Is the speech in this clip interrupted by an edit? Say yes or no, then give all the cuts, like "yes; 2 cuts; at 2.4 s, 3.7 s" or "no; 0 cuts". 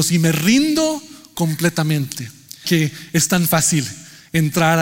yes; 1 cut; at 2.6 s